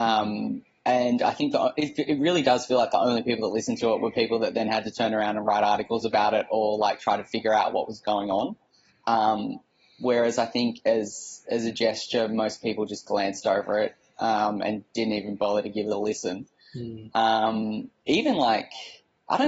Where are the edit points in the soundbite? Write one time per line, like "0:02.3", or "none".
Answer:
none